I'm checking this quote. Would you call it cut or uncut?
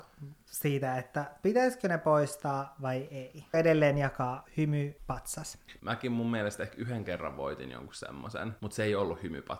cut